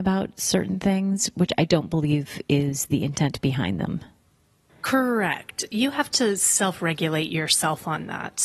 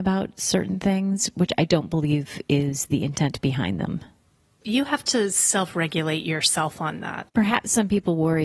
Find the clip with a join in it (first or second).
second